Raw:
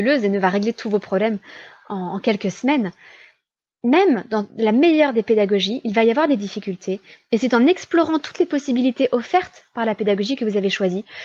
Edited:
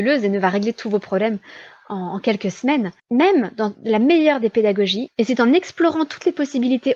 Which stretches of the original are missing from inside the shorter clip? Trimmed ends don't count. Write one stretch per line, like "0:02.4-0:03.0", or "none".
0:03.0-0:03.7
0:05.8-0:07.2